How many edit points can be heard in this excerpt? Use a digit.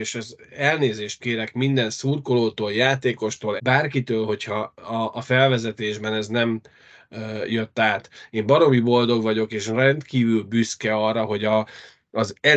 1